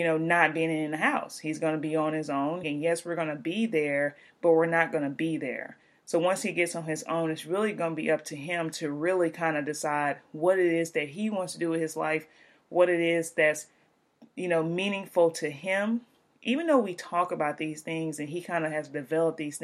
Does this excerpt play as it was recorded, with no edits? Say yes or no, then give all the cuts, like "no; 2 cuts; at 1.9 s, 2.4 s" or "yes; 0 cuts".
no; 1 cut; at 2.6 s